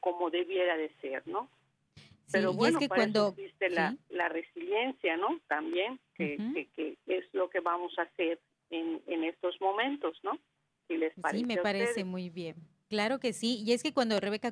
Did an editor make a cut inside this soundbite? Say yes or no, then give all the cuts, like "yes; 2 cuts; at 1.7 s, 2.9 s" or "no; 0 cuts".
no; 0 cuts